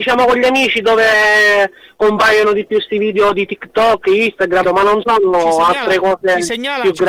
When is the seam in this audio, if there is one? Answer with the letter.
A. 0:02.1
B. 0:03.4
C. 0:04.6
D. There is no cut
C